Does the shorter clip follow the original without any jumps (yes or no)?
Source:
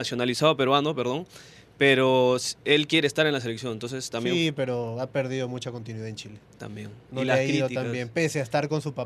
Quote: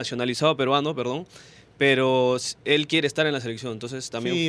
yes